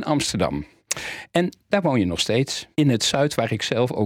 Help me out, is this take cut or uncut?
cut